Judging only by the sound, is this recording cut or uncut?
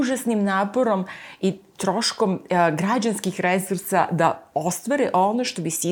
uncut